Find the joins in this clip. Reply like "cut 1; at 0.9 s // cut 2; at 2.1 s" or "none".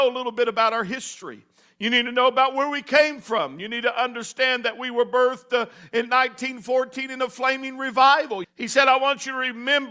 cut 1; at 8.4 s